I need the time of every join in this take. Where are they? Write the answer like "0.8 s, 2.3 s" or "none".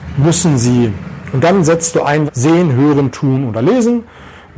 2.3 s